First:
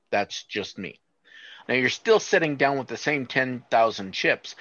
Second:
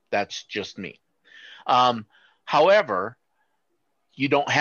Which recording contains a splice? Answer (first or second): first